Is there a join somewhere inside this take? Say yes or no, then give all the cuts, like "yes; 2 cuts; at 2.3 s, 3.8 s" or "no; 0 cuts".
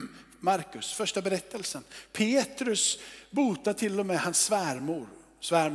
no; 0 cuts